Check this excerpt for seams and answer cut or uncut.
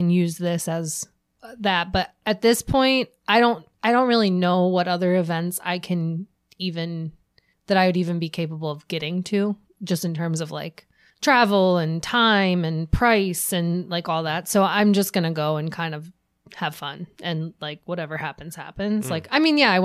uncut